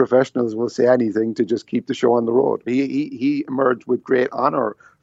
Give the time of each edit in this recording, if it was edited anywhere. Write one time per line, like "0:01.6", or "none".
0:02.7